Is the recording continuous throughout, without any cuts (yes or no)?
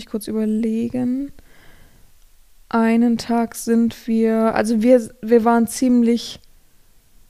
yes